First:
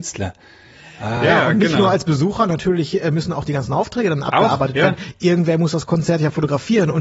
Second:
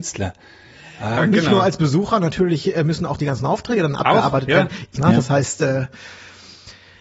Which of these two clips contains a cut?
second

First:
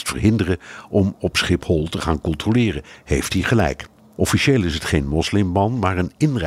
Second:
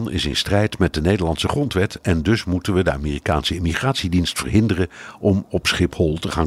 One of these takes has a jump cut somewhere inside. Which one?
first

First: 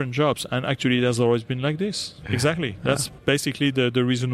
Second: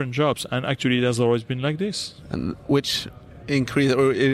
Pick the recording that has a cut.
first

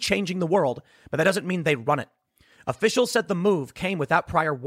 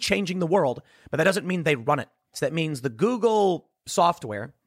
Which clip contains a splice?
second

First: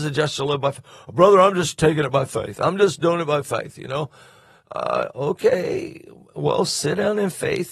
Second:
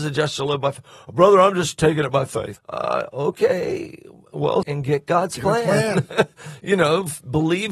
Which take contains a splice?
second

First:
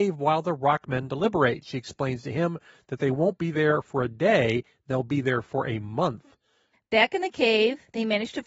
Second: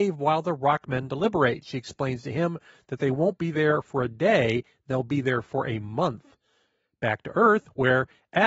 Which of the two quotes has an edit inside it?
first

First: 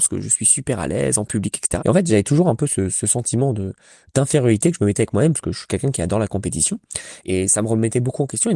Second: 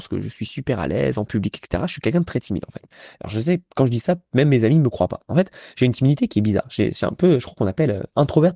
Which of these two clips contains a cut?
first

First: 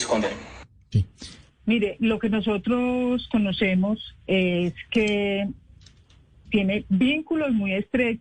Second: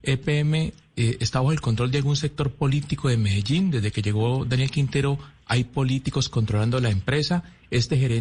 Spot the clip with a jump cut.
first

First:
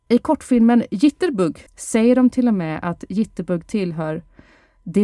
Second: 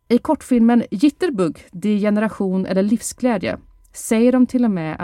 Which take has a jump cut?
first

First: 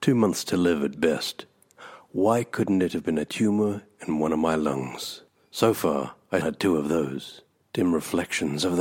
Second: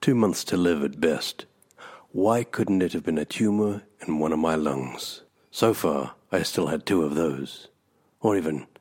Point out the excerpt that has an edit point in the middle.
first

